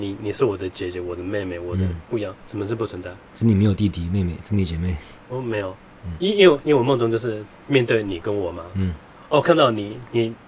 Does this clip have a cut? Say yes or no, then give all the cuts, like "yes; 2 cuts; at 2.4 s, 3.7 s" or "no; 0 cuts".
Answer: yes; 1 cut; at 2.3 s